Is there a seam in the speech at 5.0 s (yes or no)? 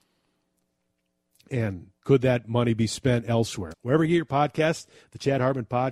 no